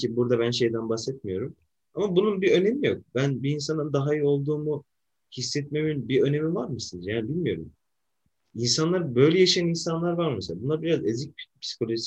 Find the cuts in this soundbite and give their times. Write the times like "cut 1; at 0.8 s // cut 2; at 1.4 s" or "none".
cut 1; at 1.8 s